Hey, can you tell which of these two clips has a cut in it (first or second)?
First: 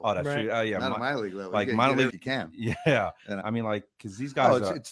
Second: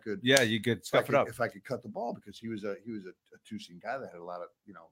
first